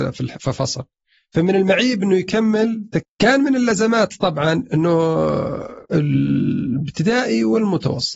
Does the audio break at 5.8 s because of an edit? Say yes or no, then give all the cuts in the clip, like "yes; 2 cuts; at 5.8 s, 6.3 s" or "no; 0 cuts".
yes; 2 cuts; at 3.0 s, 5.8 s